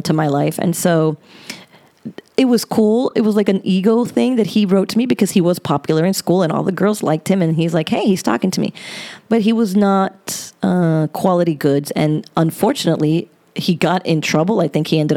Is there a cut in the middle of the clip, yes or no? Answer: no